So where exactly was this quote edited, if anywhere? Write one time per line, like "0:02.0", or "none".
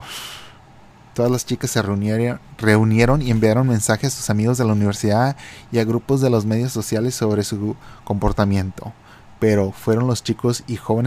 0:01.1